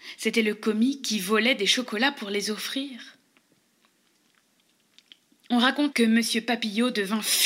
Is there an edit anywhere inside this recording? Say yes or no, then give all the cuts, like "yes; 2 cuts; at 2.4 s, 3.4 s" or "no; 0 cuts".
yes; 1 cut; at 5.9 s